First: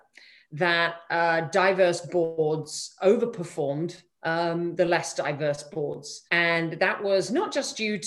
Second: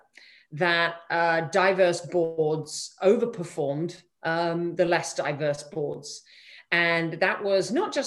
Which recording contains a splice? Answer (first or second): first